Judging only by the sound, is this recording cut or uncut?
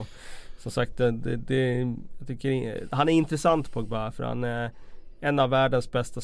uncut